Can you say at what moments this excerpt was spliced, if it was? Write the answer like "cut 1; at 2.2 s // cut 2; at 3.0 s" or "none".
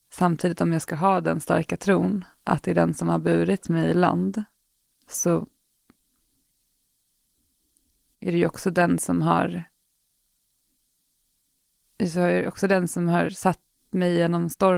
none